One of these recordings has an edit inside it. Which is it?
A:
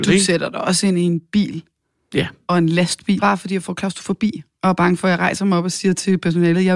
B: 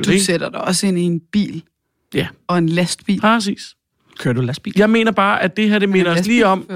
A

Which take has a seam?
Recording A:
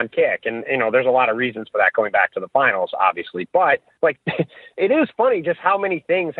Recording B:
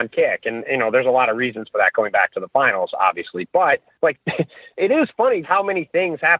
B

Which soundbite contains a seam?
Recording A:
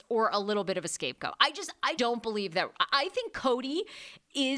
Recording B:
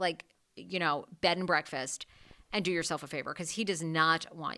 A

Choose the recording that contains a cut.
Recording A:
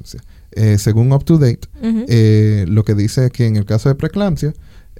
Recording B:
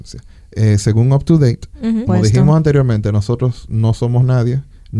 B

